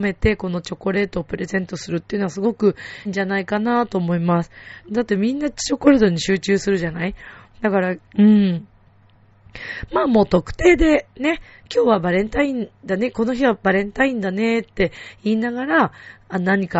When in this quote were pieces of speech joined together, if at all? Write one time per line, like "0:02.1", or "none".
0:03.1
0:04.8
0:08.0